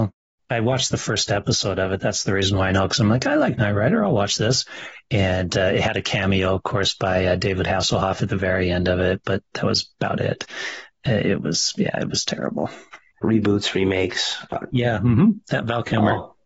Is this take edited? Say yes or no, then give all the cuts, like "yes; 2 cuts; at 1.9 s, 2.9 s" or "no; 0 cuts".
yes; 2 cuts; at 13.2 s, 14.7 s